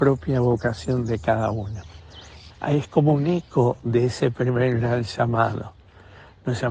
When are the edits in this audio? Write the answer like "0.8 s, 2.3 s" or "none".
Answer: 2.5 s